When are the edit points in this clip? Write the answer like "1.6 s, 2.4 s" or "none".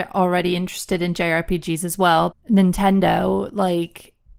2.3 s